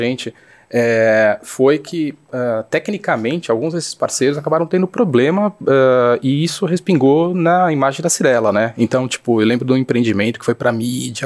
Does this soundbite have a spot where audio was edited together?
no; 0 cuts

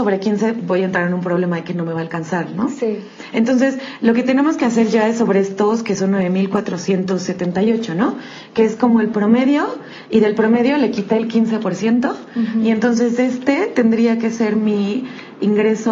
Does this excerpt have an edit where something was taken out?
no; 0 cuts

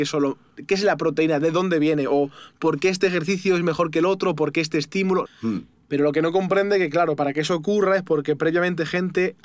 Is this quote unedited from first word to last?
no; 1 cut; at 5.3 s

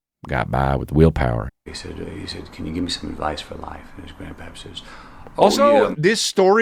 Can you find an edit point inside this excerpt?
yes; 1 cut; at 1.5 s

